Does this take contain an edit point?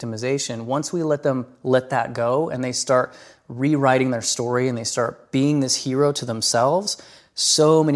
no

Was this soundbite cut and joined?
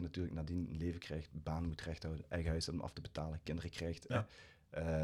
no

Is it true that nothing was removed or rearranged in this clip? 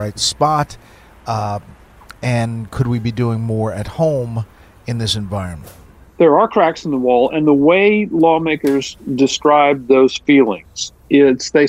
yes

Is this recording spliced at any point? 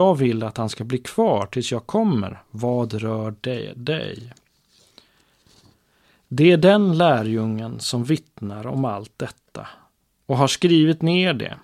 no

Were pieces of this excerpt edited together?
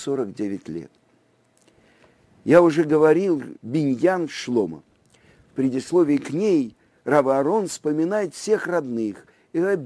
yes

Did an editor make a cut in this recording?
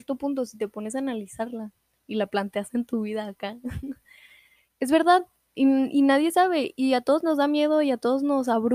no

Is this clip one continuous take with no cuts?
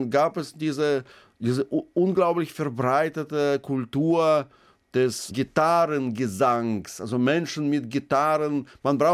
yes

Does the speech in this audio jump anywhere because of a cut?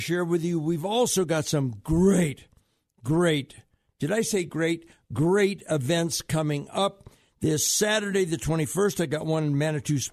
no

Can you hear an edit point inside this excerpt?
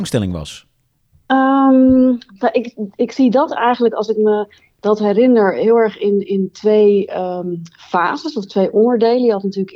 no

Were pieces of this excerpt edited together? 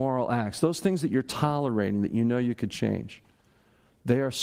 no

